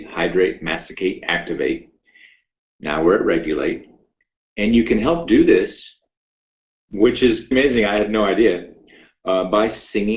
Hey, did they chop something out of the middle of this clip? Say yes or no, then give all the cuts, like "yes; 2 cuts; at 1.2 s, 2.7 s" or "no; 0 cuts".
yes; 1 cut; at 7.5 s